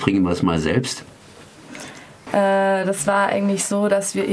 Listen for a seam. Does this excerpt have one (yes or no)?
yes